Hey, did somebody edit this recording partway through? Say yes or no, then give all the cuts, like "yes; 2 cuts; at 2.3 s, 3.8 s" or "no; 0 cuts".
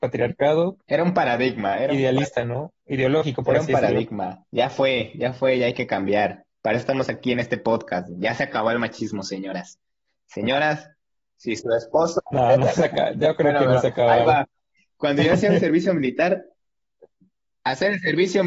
yes; 1 cut; at 17.5 s